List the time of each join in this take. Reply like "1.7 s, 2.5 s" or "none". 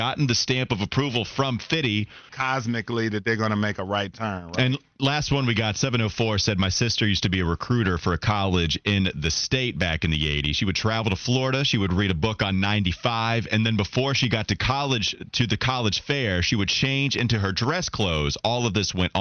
2.3 s